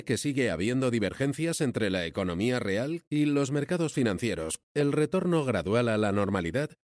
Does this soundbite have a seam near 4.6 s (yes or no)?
yes